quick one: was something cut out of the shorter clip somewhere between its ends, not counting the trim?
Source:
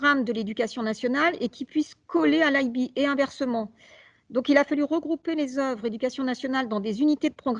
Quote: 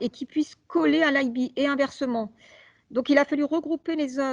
no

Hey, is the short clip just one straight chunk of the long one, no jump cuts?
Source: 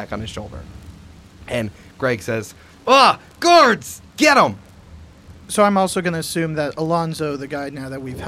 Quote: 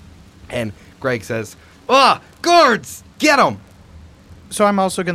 yes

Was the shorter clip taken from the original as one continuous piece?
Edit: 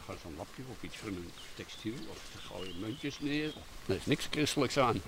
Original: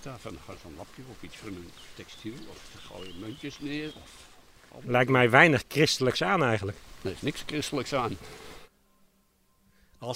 no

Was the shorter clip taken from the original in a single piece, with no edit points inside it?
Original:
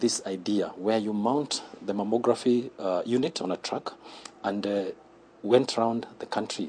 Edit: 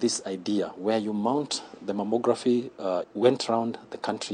no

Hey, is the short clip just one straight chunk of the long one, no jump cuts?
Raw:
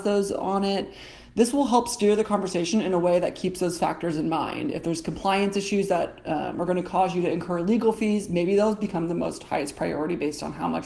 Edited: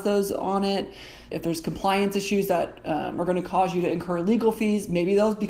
no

